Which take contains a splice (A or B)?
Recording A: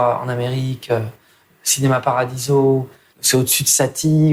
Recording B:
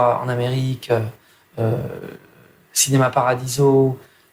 A